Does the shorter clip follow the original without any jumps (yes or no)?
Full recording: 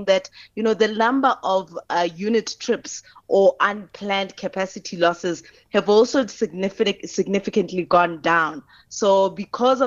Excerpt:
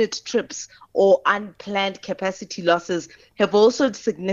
yes